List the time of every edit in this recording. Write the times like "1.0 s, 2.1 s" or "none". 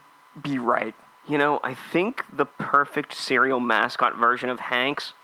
1.1 s